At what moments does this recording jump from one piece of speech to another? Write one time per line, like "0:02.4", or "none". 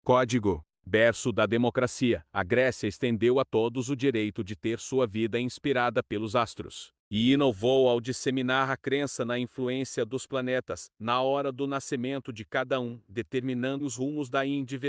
0:13.8